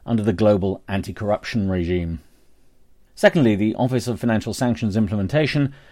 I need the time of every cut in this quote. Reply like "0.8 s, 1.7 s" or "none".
3.1 s